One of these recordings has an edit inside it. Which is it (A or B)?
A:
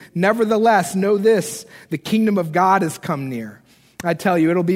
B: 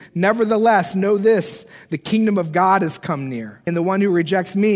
B